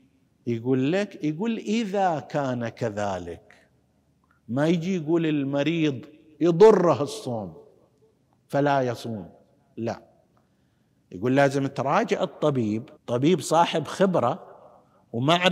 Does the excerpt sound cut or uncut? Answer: cut